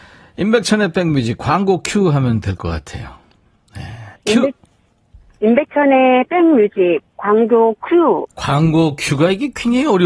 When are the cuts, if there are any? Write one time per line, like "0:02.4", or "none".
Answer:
0:04.1
0:08.3